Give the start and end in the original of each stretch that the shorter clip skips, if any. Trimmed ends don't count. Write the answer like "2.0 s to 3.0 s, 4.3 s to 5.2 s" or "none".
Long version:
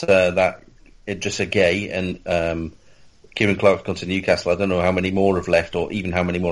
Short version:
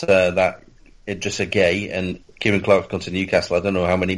2.2 s to 3.2 s